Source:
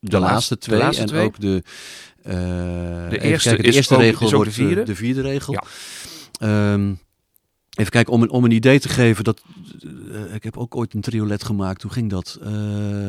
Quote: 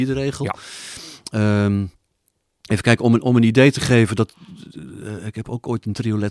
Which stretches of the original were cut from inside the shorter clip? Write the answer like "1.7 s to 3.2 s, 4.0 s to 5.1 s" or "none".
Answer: none